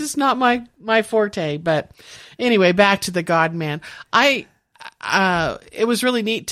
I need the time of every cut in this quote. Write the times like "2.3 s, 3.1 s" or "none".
none